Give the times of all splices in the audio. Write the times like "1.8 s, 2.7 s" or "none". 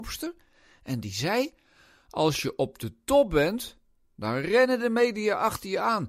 none